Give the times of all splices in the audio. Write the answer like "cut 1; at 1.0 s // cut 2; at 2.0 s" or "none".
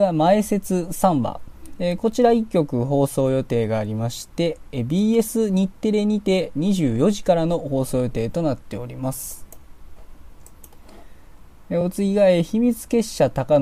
none